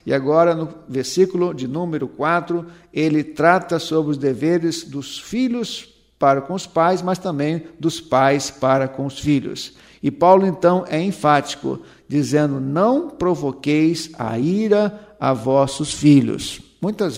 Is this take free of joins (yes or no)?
yes